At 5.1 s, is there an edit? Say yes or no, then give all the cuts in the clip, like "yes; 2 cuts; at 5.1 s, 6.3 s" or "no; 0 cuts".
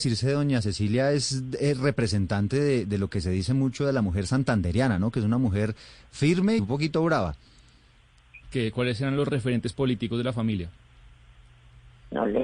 no; 2 cuts; at 6.6 s, 8.4 s